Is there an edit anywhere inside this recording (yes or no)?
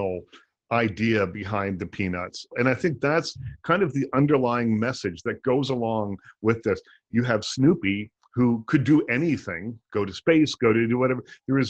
yes